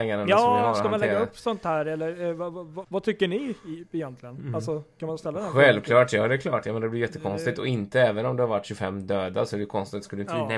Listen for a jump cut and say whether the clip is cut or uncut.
cut